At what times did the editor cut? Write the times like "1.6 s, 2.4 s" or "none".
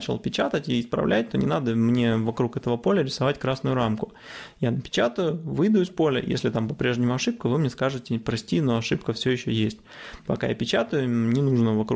none

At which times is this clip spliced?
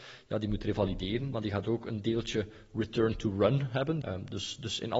1.3 s, 4.0 s

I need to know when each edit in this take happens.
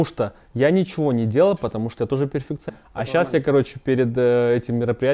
2.7 s

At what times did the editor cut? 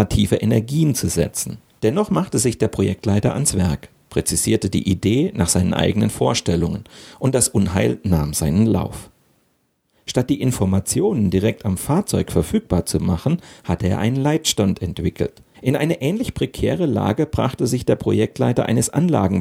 1.8 s, 15.5 s

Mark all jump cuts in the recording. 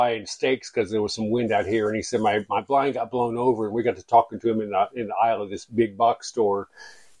none

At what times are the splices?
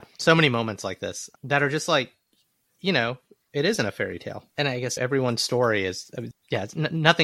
4.5 s, 6.3 s

